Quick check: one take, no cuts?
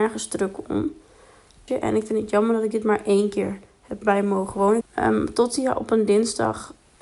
no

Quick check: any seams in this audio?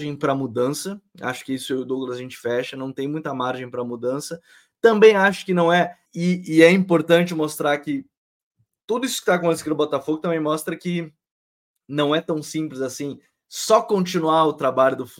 yes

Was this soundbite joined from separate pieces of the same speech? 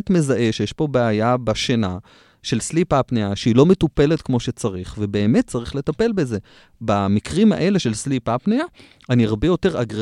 no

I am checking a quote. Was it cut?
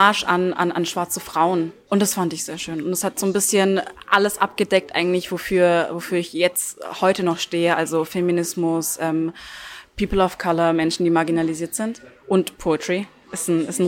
no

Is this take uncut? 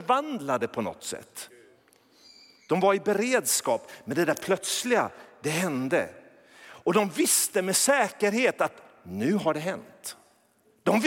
yes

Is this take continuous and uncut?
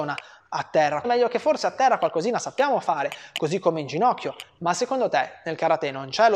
no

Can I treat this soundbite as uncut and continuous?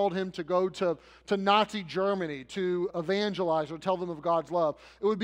no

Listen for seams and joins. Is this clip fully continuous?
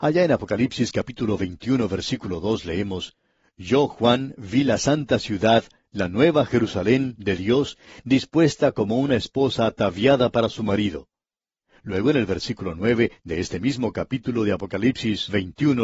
no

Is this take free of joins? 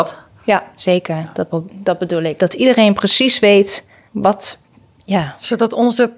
no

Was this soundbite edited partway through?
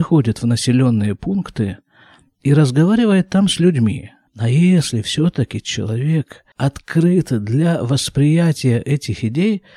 yes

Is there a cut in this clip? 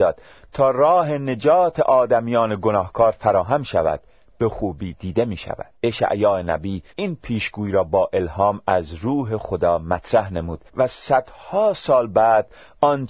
yes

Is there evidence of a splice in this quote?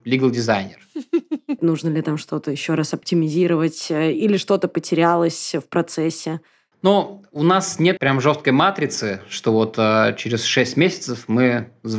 yes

